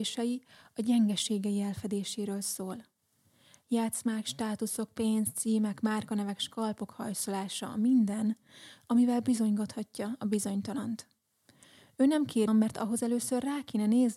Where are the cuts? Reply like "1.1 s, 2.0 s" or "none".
12.5 s